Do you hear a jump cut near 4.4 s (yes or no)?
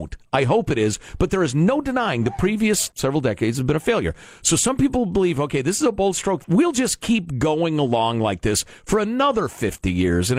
no